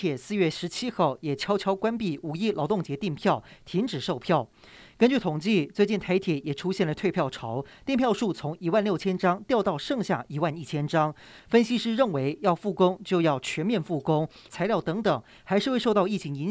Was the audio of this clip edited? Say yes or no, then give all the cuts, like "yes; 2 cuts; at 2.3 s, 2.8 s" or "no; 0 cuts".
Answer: yes; 2 cuts; at 11.4 s, 14.5 s